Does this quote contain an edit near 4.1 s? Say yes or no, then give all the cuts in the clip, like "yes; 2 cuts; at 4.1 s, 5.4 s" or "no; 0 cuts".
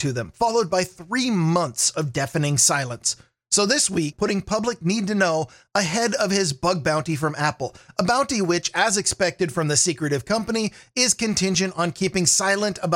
yes; 1 cut; at 4.1 s